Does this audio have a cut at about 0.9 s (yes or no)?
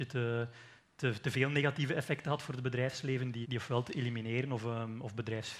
no